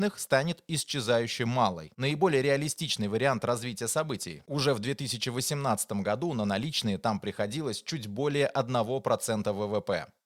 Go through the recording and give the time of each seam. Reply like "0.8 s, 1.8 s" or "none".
4.4 s